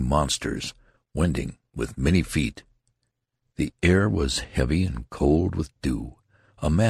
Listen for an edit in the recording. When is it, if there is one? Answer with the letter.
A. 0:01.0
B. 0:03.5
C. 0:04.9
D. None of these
D